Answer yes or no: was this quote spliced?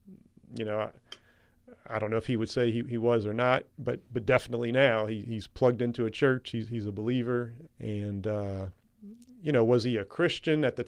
yes